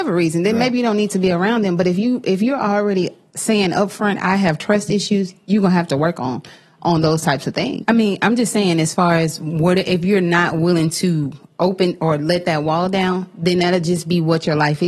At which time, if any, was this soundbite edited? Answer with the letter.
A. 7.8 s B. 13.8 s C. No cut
A